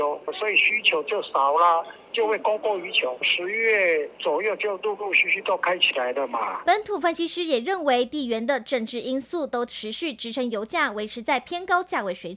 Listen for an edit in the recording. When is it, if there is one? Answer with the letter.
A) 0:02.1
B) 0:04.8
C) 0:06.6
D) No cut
C